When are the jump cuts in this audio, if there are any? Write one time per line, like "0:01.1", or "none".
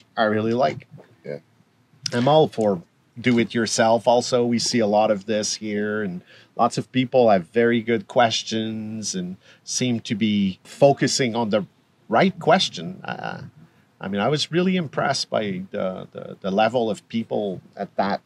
0:10.6

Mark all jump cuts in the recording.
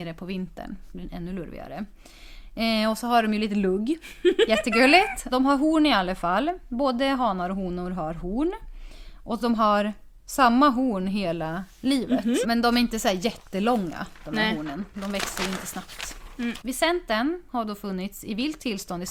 0:05.3
0:12.4
0:16.6

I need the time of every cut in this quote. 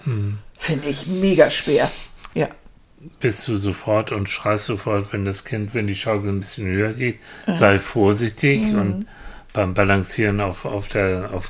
0:02.3

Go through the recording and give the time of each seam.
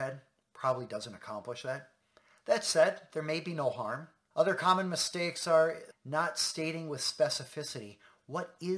0:04.3
0:05.9

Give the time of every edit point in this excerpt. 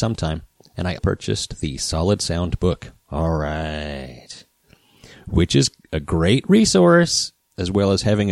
0:01.0

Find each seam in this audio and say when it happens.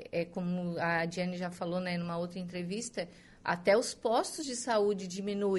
none

